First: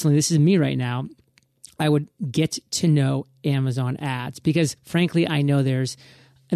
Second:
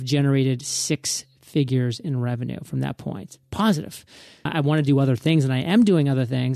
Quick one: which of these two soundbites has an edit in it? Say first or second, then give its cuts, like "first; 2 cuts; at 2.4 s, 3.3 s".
second; 1 cut; at 4.5 s